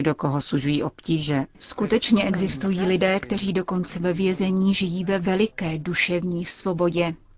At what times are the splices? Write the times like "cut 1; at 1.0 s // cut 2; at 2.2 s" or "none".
cut 1; at 1.5 s